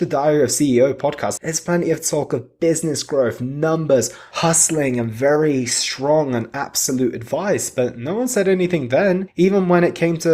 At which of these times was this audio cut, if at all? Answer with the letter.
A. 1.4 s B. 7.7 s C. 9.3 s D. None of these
A